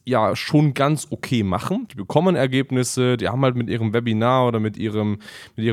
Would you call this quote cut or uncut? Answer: uncut